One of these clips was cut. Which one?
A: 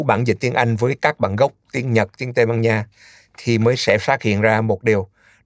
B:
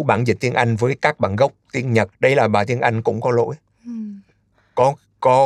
B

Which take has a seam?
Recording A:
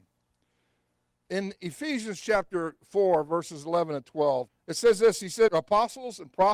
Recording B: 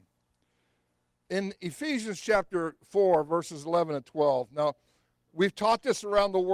A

